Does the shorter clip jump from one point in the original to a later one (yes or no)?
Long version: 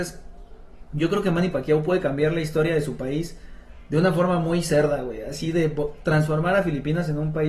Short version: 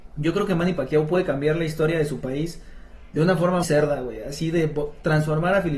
yes